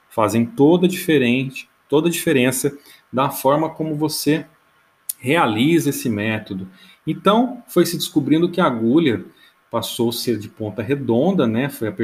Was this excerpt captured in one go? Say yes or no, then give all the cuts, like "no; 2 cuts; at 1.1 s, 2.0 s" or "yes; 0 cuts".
yes; 0 cuts